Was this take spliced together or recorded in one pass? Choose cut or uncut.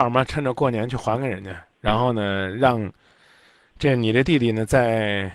uncut